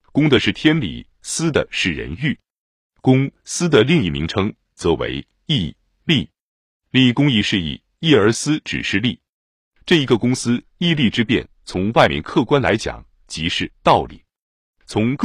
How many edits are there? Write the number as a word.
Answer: zero